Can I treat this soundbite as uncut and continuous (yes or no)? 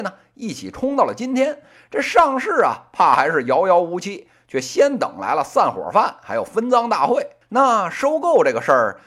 no